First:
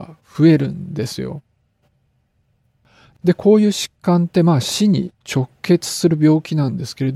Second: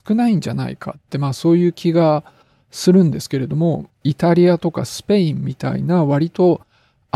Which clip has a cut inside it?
second; 1 cut; at 3.9 s

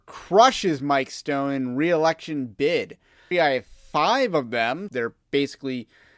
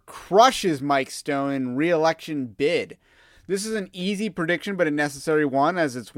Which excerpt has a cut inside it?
first; 2 cuts; at 3.3 s, 4.9 s

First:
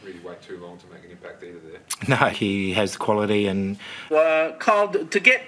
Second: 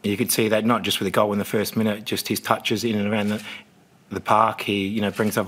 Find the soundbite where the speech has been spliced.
first; 2 cuts; at 2.3 s, 4.1 s

